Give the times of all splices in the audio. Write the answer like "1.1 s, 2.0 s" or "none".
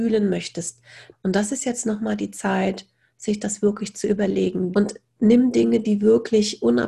1.1 s, 4.7 s